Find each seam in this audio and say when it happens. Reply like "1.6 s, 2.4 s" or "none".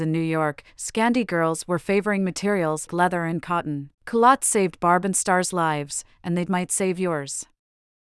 2.9 s, 3.9 s, 6.5 s